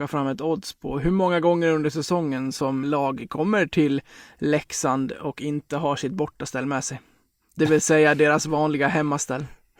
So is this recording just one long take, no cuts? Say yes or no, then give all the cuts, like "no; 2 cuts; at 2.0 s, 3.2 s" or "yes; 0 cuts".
no; 1 cut; at 2.8 s